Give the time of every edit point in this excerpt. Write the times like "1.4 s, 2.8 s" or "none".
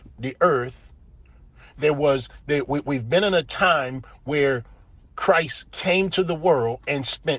none